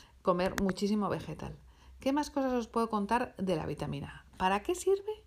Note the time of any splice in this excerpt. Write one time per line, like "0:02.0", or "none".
none